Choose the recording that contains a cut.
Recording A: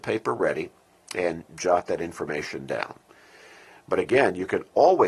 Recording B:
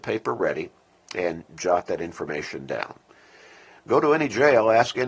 B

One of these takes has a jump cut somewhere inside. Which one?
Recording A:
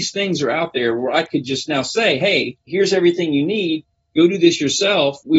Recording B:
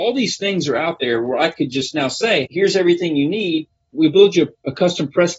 B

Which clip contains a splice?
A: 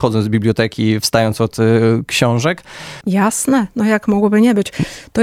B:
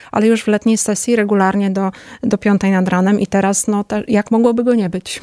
A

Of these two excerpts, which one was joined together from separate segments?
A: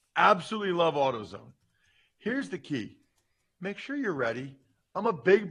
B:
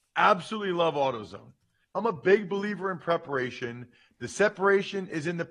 B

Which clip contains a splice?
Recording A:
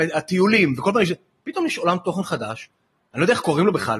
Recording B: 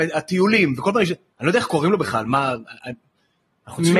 B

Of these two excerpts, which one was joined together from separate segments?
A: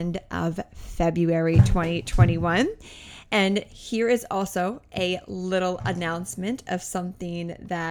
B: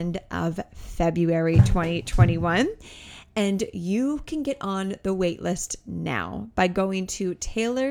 A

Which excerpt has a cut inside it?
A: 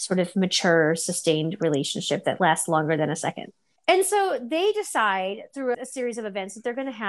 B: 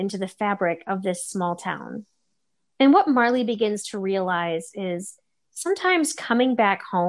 A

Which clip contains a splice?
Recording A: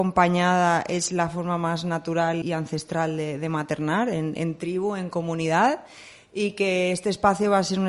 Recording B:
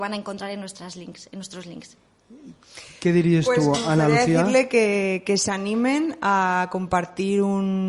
A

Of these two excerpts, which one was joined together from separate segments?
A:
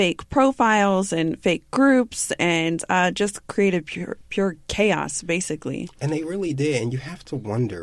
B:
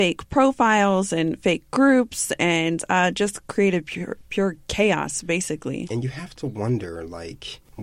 B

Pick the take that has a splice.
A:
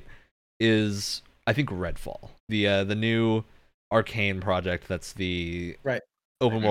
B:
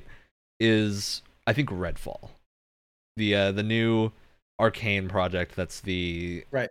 A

